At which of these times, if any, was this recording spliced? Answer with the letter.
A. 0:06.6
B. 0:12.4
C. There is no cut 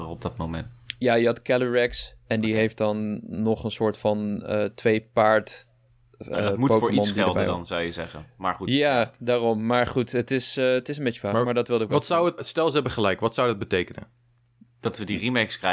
B